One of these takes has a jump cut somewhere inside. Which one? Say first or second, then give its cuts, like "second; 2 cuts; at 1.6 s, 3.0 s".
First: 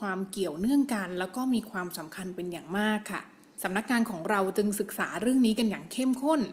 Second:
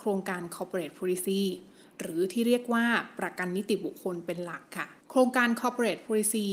second; 1 cut; at 5.0 s